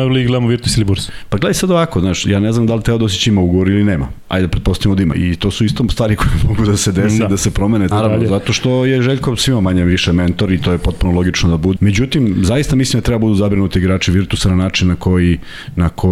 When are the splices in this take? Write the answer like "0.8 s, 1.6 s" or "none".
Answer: 5.1 s, 7.9 s, 11.8 s